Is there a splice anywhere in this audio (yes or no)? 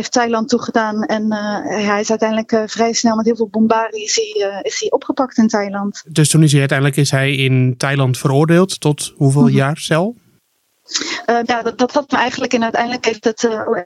yes